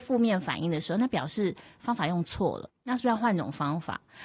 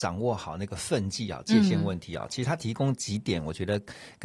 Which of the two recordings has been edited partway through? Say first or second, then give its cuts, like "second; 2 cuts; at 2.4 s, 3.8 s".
first; 1 cut; at 2.7 s